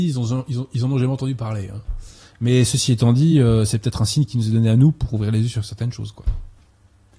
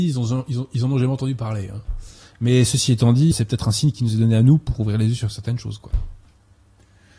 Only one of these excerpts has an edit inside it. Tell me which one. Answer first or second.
second